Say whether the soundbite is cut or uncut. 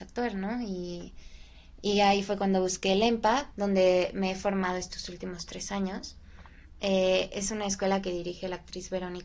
cut